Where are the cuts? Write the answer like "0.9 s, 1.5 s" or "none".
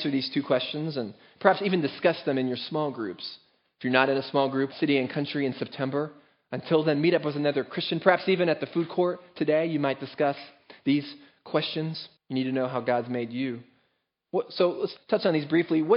4.7 s, 12.2 s, 15.0 s